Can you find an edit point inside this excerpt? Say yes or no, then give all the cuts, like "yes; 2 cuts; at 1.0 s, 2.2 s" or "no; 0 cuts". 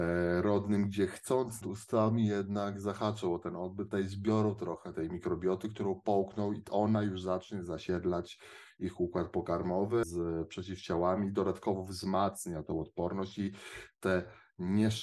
yes; 3 cuts; at 1.6 s, 3.9 s, 10.0 s